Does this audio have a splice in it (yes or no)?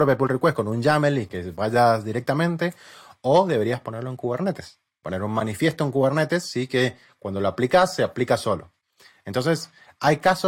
no